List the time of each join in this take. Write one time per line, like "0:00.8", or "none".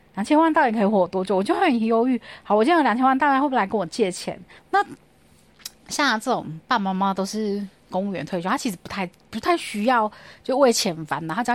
0:04.6